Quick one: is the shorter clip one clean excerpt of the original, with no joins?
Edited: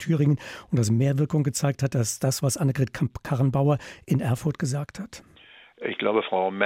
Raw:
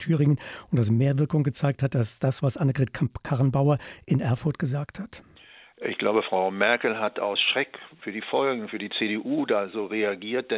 yes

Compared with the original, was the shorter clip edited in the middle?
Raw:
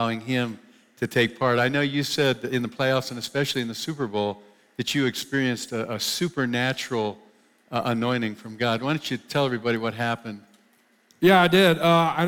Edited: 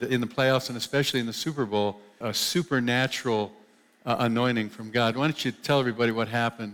yes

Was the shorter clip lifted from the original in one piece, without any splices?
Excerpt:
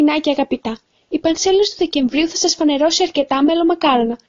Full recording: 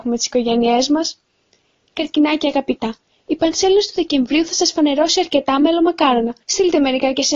yes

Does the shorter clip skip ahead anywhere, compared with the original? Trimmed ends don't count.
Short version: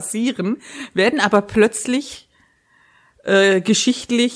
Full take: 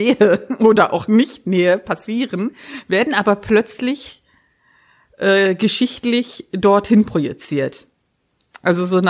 no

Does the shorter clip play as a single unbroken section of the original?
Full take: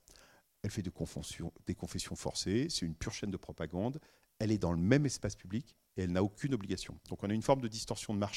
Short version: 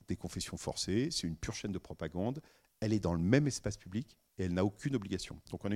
yes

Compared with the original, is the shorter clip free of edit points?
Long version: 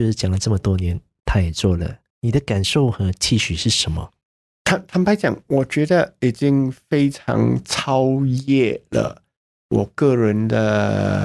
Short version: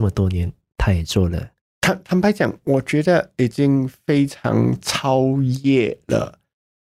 no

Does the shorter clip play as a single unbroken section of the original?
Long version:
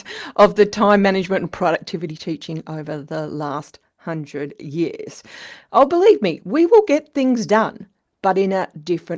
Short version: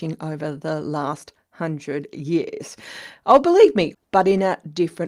no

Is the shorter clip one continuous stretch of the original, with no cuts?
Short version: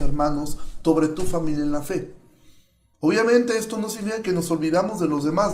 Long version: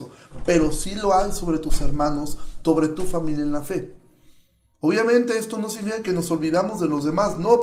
yes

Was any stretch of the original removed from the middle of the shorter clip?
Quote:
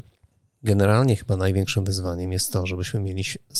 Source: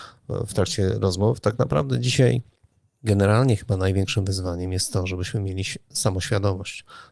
no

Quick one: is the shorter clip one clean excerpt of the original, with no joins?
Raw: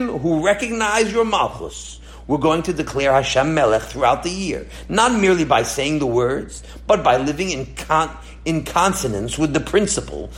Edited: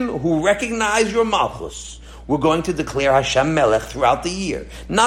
yes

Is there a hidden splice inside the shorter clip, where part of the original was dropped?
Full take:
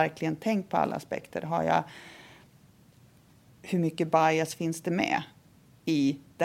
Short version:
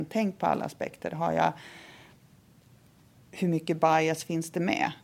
no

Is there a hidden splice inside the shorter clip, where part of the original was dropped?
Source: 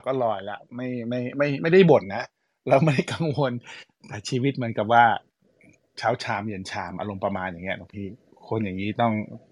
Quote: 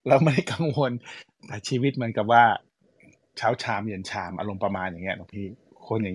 no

